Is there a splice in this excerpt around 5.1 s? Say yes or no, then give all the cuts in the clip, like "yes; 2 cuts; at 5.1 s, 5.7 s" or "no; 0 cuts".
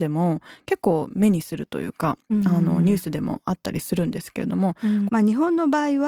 yes; 1 cut; at 5.1 s